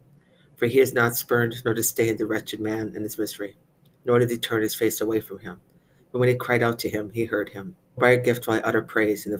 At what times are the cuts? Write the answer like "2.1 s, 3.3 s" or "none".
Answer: 8.0 s

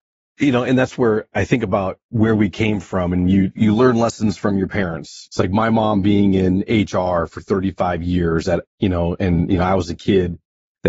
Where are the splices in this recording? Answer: 5.3 s, 8.6 s

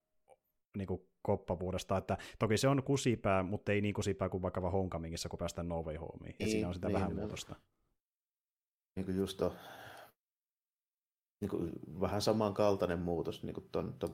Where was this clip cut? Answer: none

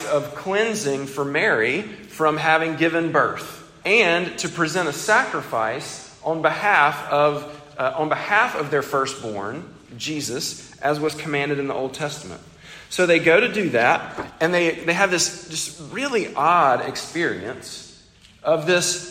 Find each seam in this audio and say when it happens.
3.8 s

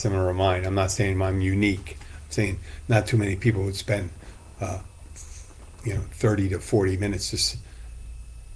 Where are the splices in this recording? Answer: none

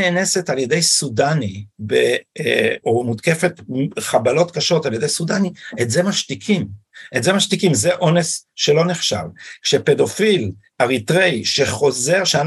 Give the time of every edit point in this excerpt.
1.7 s, 2.8 s

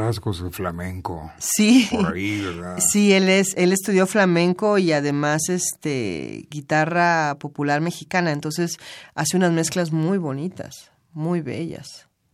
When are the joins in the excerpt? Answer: none

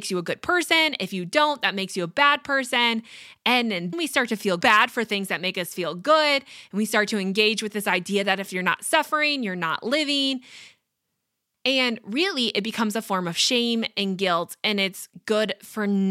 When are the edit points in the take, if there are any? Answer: 3.9 s

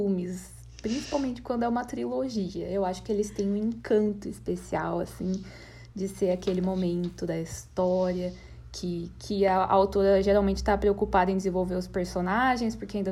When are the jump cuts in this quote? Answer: none

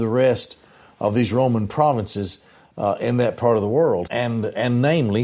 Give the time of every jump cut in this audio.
4.1 s

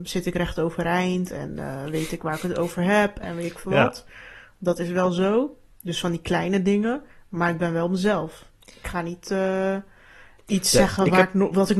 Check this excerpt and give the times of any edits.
none

